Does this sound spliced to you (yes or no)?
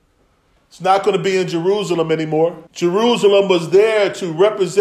yes